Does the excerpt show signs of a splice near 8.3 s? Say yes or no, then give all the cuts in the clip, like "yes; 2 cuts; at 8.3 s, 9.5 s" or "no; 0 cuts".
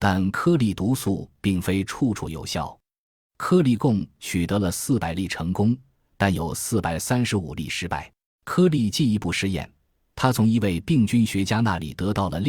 yes; 1 cut; at 8.3 s